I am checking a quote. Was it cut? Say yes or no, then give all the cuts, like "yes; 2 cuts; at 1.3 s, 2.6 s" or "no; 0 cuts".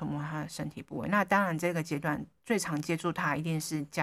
no; 0 cuts